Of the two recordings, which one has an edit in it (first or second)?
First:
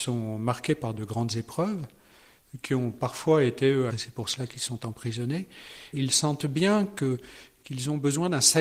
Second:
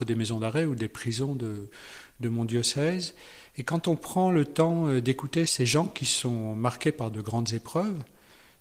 first